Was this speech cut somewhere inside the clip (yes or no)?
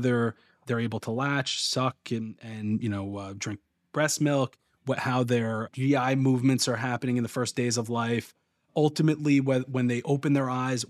no